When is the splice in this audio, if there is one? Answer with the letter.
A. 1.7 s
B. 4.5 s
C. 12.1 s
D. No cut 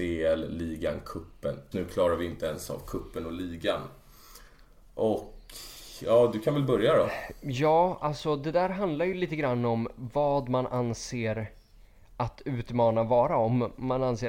A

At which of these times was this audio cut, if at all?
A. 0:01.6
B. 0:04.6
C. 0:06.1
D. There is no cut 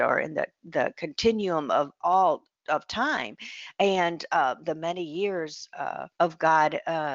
C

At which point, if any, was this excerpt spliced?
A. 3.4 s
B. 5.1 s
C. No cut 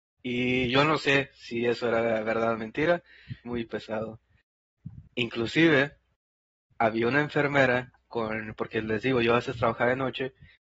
A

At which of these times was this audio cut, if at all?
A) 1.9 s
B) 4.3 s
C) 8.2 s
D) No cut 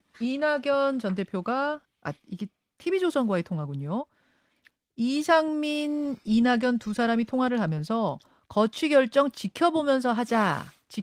A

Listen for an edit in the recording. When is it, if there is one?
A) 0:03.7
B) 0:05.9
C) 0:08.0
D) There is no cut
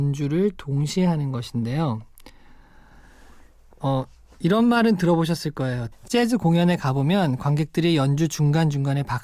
B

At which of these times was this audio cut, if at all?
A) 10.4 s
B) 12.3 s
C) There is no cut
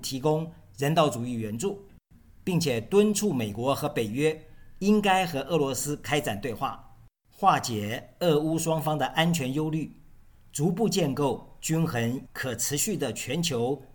B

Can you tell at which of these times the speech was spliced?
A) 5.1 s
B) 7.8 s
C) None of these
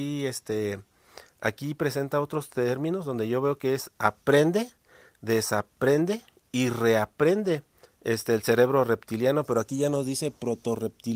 B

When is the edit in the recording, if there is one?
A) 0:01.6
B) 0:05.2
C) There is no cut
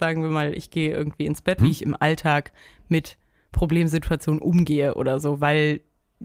A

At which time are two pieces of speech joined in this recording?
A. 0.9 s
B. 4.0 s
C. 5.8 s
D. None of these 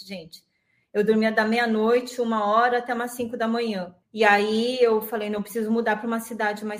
B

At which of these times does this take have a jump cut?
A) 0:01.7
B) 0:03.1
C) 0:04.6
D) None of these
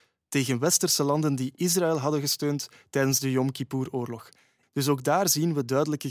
C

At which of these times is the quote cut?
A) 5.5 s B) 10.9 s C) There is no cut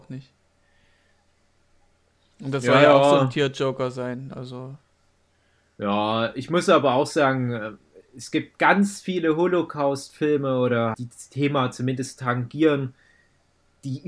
B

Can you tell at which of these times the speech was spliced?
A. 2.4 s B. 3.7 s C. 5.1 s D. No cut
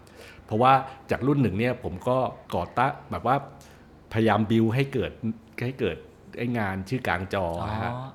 A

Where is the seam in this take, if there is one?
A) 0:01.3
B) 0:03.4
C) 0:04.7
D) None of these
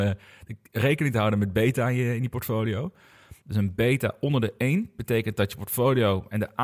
B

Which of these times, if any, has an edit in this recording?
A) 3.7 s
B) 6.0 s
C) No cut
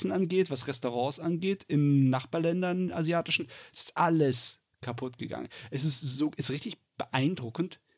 C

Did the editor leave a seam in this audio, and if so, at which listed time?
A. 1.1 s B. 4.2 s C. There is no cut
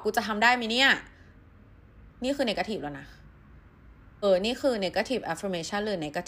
B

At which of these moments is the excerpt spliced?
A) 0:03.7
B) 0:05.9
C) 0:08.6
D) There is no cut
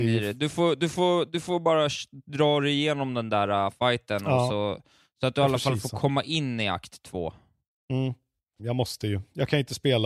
C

